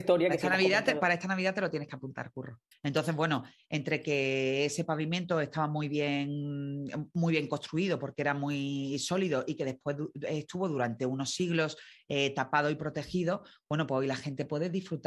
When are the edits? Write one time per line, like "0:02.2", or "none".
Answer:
0:02.7

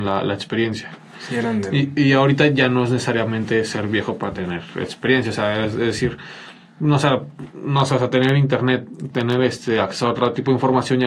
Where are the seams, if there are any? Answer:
none

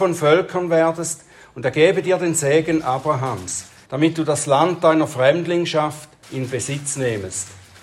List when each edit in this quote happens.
0:03.9
0:06.2

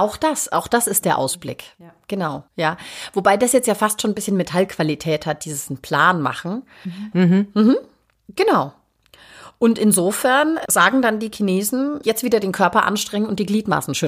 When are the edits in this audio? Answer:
0:02.5
0:07.1
0:12.0

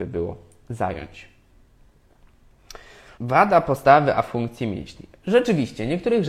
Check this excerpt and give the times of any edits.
0:03.1

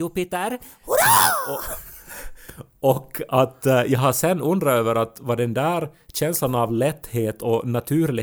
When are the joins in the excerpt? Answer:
none

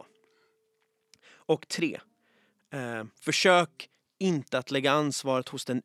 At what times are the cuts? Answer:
none

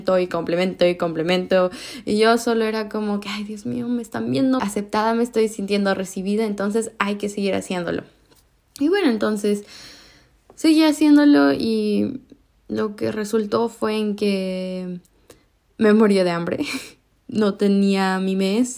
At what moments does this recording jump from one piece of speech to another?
0:04.6

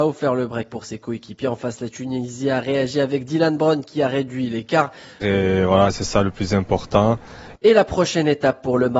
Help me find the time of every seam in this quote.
0:05.2
0:07.5

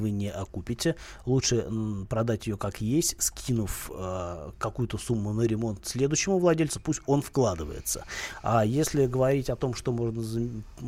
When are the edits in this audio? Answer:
none

